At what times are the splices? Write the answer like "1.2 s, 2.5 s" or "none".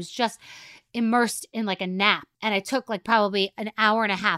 2.3 s